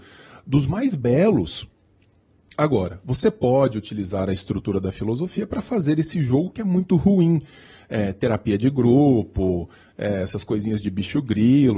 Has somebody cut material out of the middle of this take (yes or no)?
no